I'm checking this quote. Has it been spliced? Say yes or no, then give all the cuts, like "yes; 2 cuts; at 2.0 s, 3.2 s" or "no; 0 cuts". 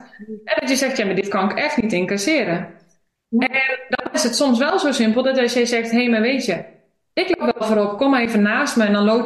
no; 0 cuts